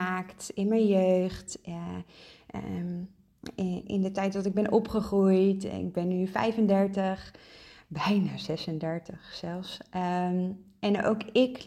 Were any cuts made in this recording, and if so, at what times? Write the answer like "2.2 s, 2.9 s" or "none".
3.8 s